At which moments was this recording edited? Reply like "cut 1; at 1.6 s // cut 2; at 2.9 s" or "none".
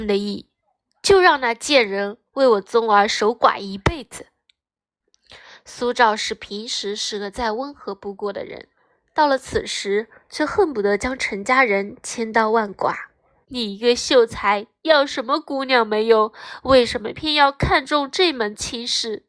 cut 1; at 13.4 s // cut 2; at 17.1 s